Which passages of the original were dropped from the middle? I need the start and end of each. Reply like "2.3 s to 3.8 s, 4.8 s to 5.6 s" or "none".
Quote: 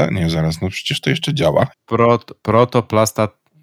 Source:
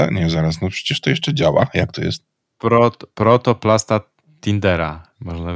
1.7 s to 2.4 s